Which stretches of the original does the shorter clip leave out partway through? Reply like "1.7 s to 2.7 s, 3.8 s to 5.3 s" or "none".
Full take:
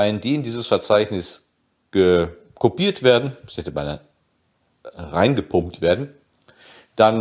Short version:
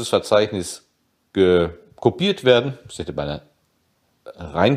none